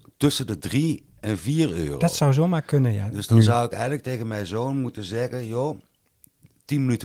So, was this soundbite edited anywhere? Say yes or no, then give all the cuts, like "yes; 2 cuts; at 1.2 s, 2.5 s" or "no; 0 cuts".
no; 0 cuts